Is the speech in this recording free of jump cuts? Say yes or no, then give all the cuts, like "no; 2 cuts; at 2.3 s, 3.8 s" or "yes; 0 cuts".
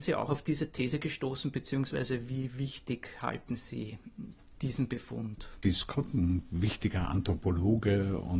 no; 1 cut; at 5.6 s